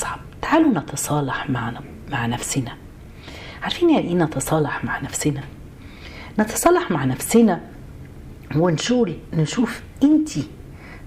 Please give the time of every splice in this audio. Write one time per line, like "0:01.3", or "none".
none